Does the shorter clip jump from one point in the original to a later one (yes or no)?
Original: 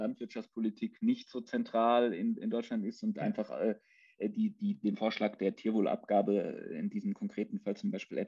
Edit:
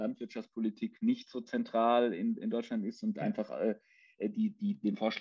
no